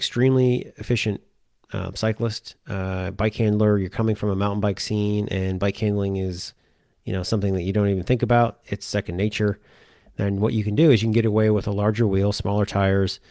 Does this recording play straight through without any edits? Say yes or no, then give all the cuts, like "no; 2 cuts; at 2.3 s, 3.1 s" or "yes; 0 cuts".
yes; 0 cuts